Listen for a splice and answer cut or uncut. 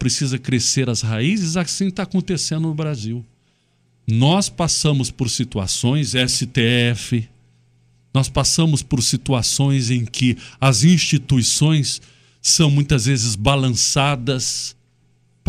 uncut